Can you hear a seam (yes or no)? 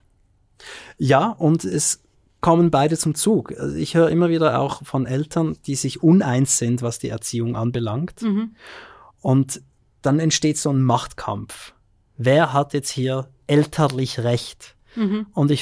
no